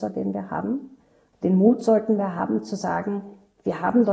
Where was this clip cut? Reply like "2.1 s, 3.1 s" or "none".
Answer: 1.3 s